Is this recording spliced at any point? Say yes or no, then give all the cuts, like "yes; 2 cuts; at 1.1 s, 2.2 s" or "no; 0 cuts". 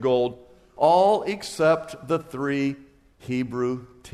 no; 0 cuts